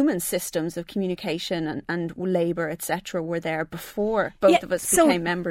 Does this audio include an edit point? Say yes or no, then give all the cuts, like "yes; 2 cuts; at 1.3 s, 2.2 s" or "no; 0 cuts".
yes; 1 cut; at 1.8 s